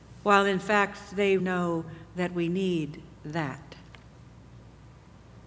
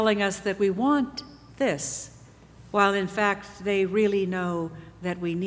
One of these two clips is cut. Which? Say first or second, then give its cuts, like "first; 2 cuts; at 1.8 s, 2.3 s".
first; 1 cut; at 1.4 s